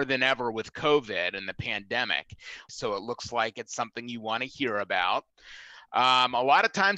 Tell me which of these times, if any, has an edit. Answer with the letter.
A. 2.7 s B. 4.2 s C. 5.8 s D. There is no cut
A